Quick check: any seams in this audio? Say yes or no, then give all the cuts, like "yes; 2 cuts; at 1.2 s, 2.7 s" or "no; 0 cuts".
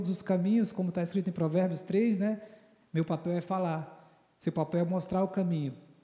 yes; 1 cut; at 2.8 s